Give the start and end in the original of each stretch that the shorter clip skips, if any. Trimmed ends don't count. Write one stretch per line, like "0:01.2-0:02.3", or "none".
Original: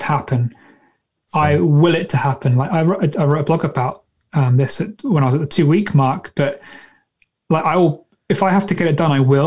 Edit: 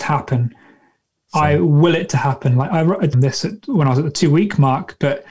0:03.1-0:04.5